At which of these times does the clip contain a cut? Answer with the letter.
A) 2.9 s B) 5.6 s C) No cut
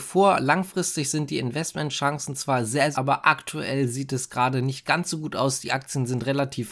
A